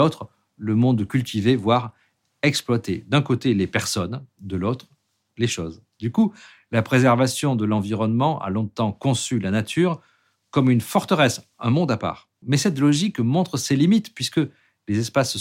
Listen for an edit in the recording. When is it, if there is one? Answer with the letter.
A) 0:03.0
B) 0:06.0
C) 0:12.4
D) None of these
C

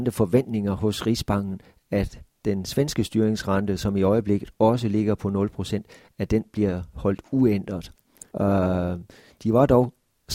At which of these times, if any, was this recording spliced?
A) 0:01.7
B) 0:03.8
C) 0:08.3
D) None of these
C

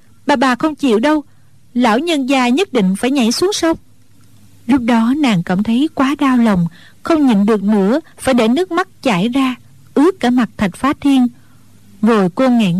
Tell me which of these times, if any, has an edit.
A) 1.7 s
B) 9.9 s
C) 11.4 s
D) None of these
D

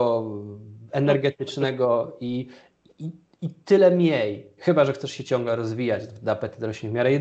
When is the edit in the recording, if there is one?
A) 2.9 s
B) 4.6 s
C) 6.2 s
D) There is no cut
B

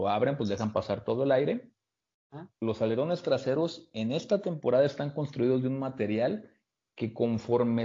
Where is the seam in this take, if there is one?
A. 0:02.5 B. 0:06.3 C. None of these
A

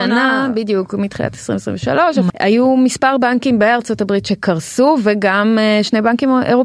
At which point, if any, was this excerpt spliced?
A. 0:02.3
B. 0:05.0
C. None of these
A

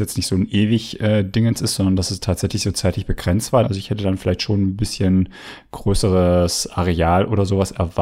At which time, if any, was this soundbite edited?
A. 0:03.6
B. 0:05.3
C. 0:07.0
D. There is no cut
A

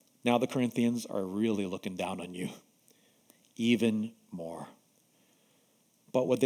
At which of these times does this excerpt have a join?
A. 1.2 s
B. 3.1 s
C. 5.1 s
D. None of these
D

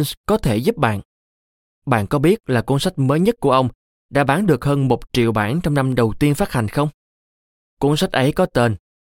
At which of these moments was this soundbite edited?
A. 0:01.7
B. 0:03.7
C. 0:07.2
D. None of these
D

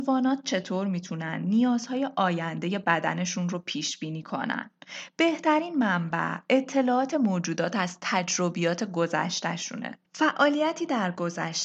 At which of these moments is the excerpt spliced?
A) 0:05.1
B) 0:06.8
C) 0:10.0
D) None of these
C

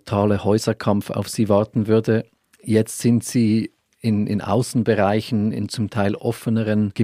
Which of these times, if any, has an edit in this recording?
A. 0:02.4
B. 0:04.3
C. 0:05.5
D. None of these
D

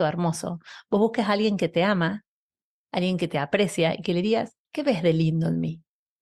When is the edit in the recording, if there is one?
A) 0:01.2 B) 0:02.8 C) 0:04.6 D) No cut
C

